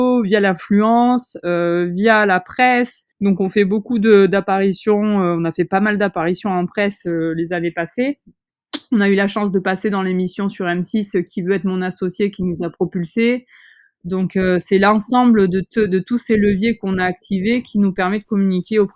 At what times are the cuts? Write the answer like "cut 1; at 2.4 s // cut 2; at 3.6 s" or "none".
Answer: cut 1; at 3.1 s // cut 2; at 13.9 s // cut 3; at 15.7 s